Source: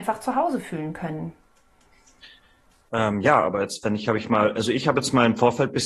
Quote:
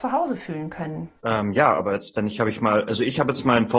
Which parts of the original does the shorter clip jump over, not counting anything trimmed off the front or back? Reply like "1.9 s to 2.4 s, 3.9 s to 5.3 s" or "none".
1.4 s to 2.9 s